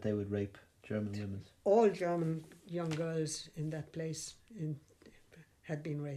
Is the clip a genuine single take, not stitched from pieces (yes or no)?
yes